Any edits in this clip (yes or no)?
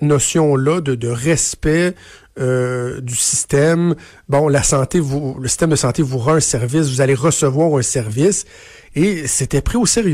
no